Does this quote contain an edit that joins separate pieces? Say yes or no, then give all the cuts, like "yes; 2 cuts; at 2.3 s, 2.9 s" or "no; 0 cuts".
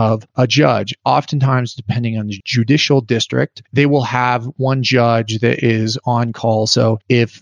no; 0 cuts